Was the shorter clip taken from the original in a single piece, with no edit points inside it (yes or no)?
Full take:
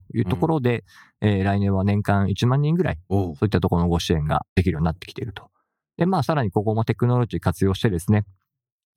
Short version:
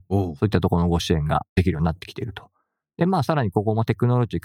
yes